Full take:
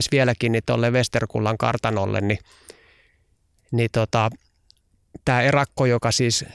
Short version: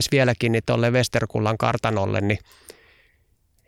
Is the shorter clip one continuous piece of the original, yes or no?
yes